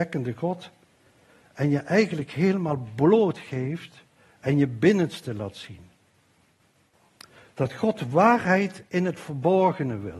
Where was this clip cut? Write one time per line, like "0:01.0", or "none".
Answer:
none